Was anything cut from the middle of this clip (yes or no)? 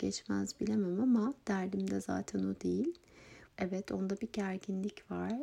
yes